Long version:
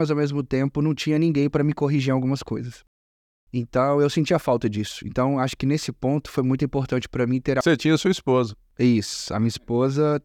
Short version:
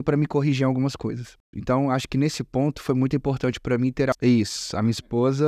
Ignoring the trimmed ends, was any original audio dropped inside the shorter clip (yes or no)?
yes